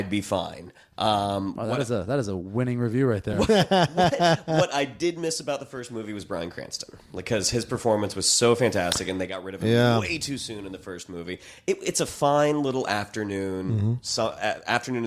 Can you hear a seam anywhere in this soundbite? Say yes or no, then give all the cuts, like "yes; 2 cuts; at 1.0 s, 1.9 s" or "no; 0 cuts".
no; 0 cuts